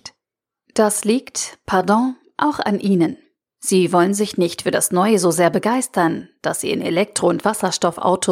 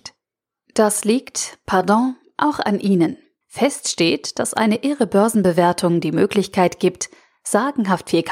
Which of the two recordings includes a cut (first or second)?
second